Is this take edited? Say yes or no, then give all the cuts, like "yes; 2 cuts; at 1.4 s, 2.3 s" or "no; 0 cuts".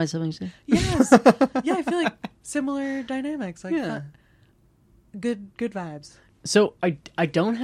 no; 0 cuts